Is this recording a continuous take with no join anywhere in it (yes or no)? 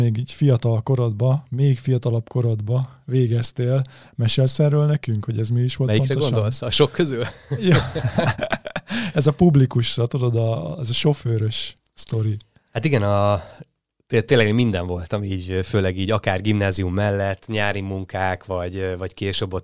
yes